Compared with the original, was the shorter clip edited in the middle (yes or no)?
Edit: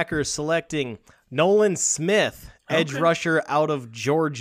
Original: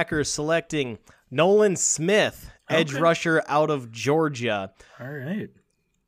no